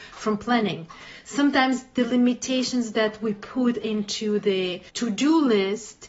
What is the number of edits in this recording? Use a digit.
2